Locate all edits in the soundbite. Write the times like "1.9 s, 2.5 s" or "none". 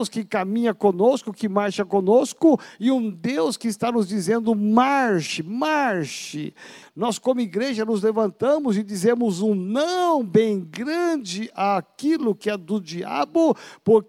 6.8 s